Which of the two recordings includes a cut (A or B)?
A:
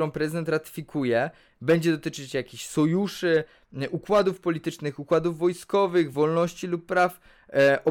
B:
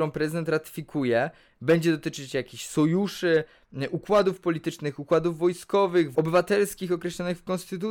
B